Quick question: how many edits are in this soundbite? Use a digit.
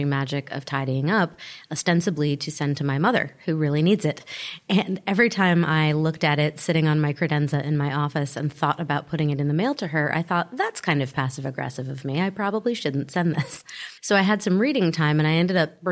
1